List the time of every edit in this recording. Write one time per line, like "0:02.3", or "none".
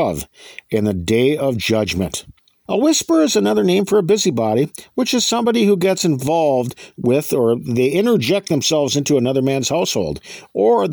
0:02.7